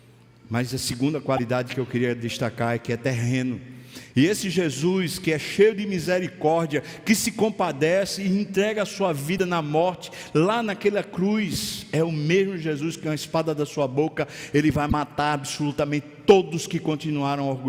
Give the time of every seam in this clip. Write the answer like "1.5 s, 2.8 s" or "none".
4.1 s